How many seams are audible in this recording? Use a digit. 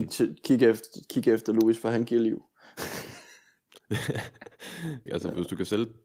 1